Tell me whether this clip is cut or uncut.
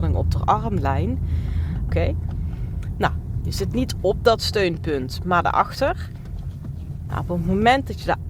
cut